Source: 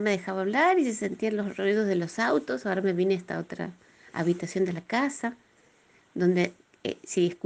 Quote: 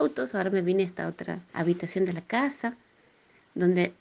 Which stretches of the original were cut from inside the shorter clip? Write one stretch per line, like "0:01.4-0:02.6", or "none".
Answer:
0:03.8-0:04.1